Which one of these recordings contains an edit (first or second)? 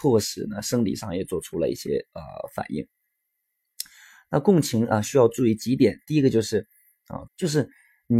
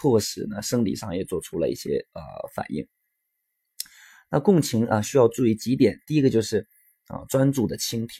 first